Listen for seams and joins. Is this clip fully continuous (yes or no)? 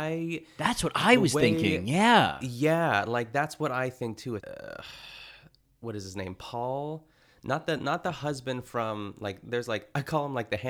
no